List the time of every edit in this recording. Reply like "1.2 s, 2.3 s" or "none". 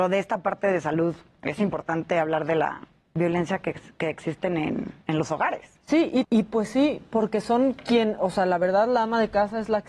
6.2 s